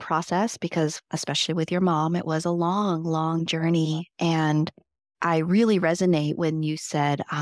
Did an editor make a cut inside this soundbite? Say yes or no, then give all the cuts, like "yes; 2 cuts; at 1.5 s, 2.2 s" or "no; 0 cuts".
no; 0 cuts